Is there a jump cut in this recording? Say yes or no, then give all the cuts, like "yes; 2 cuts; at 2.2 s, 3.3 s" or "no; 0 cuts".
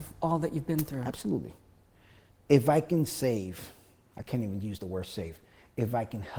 no; 0 cuts